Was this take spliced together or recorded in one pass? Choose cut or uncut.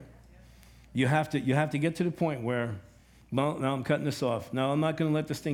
uncut